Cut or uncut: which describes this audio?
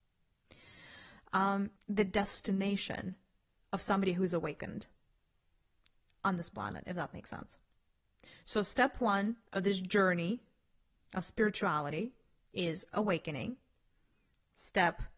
cut